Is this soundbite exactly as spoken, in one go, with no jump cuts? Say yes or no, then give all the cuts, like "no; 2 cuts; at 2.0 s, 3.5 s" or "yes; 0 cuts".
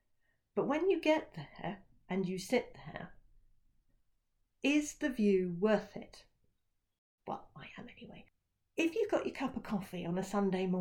no; 1 cut; at 7.2 s